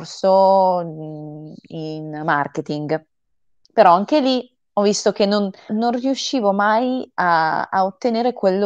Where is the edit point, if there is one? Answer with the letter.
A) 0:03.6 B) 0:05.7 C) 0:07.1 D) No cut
B